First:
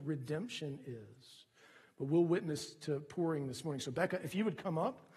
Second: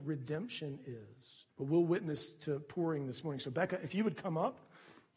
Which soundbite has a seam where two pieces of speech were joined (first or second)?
second